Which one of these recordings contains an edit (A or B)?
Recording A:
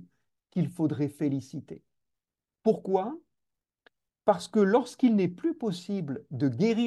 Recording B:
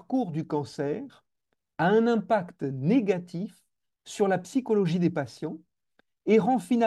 A